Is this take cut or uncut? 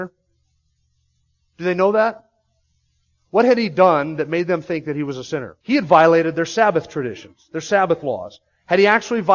cut